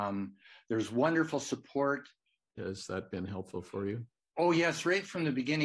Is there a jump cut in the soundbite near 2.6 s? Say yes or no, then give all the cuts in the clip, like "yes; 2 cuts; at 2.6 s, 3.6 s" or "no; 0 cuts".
yes; 1 cut; at 2.6 s